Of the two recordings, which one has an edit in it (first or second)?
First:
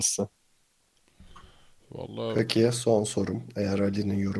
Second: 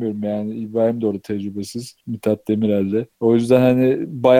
second